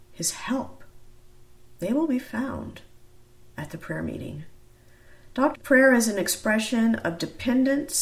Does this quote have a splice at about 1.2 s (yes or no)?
no